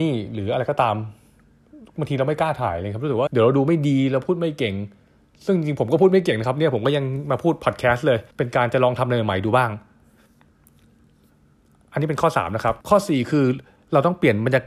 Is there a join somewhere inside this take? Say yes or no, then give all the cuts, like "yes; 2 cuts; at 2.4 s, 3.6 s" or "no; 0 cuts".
yes; 3 cuts; at 3.3 s, 8.3 s, 12.8 s